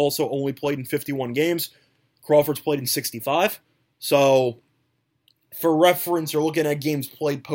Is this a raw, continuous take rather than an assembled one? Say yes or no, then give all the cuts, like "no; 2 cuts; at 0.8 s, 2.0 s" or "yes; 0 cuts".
yes; 0 cuts